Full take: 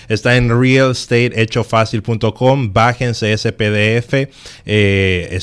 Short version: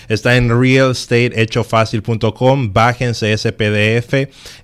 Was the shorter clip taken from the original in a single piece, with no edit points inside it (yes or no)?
yes